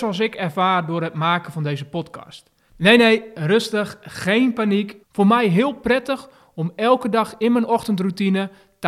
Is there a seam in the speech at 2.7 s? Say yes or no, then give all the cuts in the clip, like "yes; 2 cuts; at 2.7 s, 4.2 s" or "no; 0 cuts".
yes; 2 cuts; at 2.7 s, 5.0 s